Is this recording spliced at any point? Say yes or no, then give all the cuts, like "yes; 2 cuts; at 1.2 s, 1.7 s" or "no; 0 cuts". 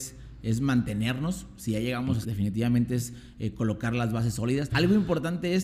yes; 2 cuts; at 2.2 s, 4.7 s